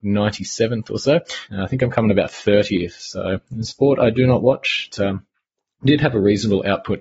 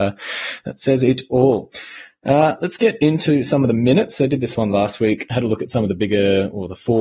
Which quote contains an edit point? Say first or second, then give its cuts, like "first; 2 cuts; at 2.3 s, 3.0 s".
first; 2 cuts; at 1.5 s, 4.9 s